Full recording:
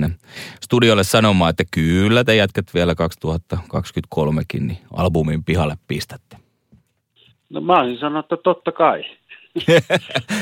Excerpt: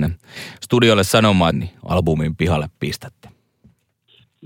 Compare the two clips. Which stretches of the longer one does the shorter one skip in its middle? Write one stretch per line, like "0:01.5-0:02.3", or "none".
0:01.5-0:04.6